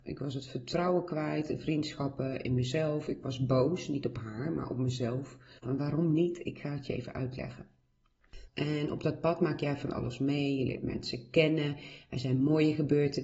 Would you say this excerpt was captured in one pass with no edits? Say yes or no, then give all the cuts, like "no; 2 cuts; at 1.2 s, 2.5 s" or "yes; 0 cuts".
no; 2 cuts; at 5.6 s, 8.5 s